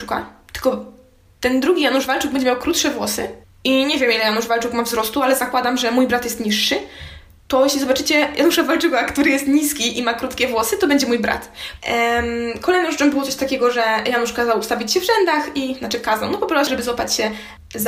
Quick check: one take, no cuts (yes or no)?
no